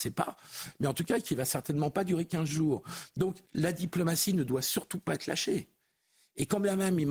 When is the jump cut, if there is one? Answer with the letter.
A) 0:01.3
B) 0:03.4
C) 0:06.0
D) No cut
B